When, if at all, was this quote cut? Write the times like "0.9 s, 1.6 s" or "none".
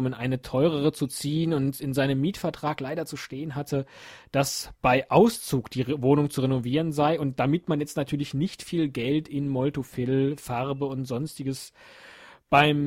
none

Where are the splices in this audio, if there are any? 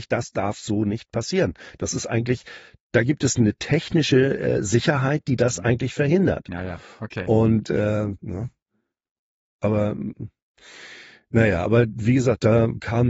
8.2 s

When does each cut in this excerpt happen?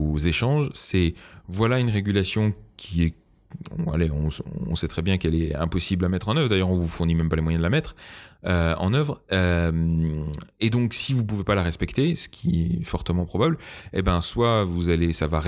none

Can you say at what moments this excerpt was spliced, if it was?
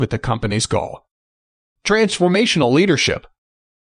1.7 s

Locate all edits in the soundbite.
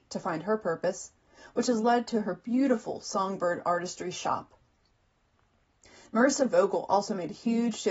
none

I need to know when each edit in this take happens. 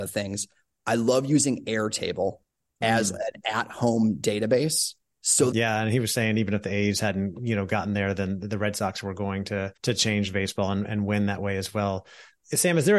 5.5 s, 9.8 s

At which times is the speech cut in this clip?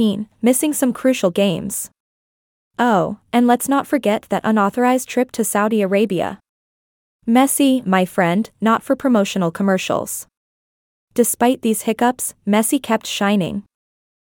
8.5 s

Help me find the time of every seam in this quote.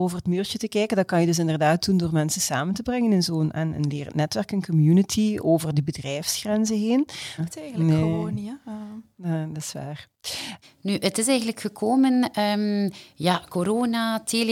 7.4 s, 10.6 s

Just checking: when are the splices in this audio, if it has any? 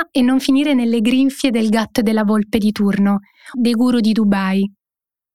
3.5 s

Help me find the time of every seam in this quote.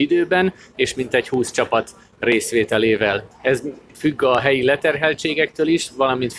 3.3 s

